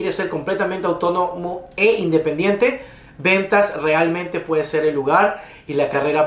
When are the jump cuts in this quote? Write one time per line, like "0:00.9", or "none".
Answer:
none